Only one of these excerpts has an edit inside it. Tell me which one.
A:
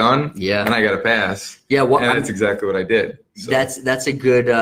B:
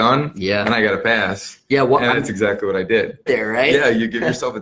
B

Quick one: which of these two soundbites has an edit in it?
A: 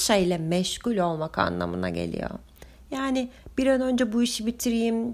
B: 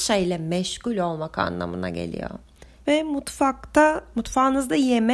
B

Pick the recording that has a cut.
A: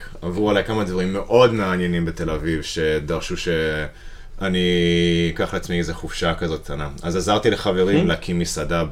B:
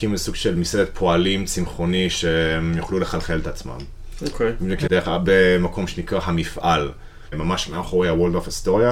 B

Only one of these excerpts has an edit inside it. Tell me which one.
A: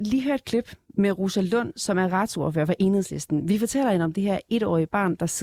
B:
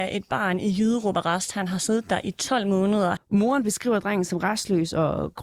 B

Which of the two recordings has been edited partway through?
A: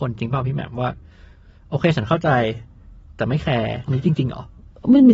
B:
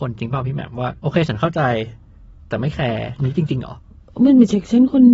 B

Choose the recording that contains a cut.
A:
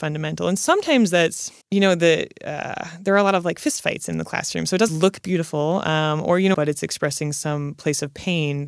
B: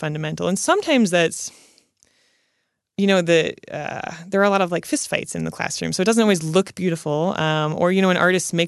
A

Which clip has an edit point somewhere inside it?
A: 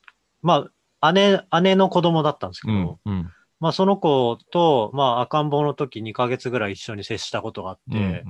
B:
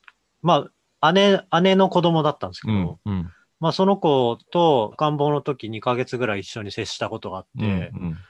B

